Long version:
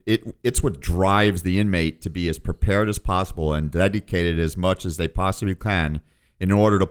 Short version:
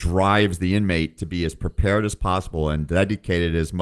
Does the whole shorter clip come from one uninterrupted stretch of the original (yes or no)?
yes